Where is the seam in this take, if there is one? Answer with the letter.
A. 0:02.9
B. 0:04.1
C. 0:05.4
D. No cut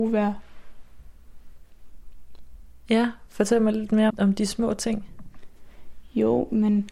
B